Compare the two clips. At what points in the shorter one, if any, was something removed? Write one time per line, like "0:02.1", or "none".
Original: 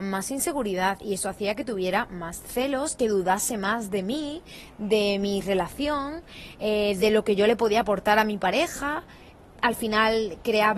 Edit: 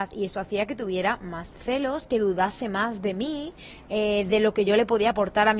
0:03.9